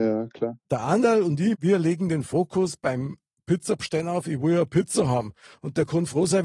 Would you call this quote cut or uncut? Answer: uncut